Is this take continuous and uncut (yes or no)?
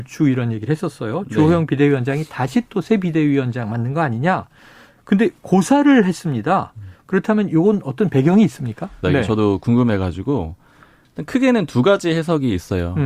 no